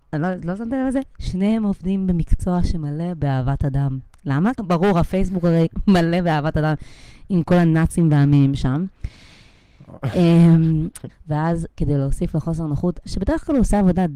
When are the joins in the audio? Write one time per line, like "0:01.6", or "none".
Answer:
0:04.5
0:11.1
0:13.0

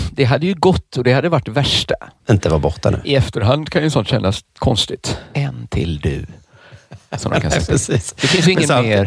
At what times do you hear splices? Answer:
0:02.2
0:05.3

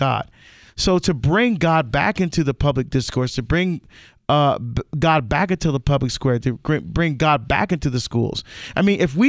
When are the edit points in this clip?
none

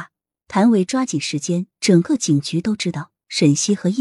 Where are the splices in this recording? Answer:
0:01.7

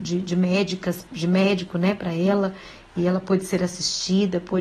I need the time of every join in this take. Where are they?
0:01.1

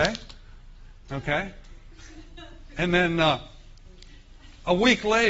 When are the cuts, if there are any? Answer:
0:01.0

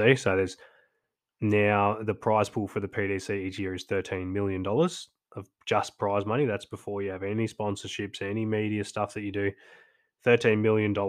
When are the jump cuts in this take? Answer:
none

